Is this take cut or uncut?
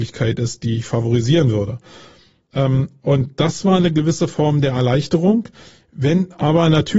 cut